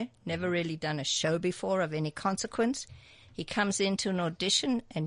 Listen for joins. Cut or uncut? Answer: uncut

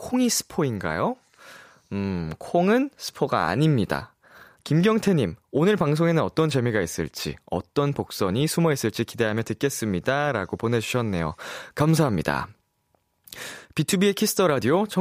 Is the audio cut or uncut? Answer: cut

